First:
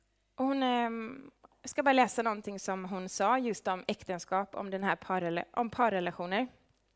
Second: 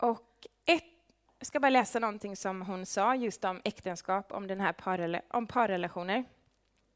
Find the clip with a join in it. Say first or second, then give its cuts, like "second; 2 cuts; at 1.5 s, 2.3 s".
second; 1 cut; at 1.3 s